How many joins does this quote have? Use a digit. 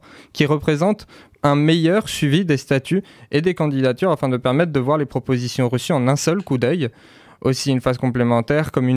0